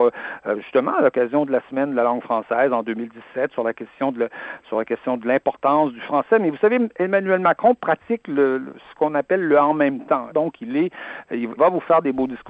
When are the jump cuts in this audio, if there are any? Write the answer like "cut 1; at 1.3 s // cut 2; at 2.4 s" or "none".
cut 1; at 10.3 s // cut 2; at 11.6 s